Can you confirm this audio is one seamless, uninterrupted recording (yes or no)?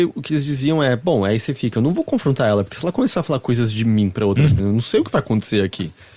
no